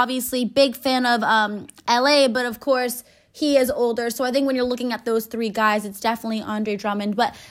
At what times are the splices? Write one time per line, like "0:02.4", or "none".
none